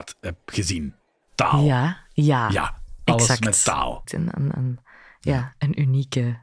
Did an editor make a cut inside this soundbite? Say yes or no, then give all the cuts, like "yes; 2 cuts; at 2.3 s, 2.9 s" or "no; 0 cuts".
yes; 1 cut; at 4.0 s